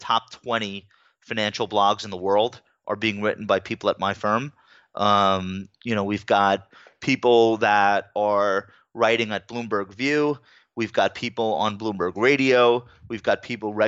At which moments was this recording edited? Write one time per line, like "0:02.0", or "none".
none